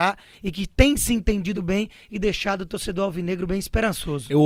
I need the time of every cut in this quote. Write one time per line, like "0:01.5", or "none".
0:01.5